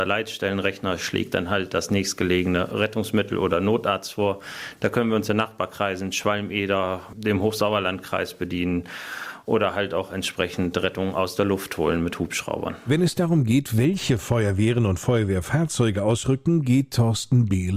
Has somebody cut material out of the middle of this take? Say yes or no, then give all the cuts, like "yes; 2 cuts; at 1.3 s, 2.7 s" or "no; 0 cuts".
no; 0 cuts